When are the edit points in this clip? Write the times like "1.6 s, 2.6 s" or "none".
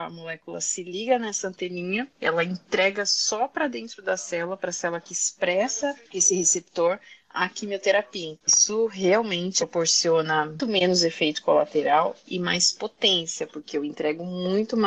8.4 s, 10.6 s